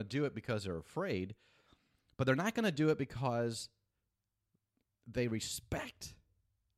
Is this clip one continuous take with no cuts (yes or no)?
yes